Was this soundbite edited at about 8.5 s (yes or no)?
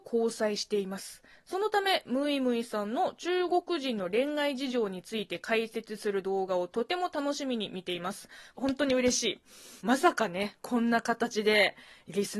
yes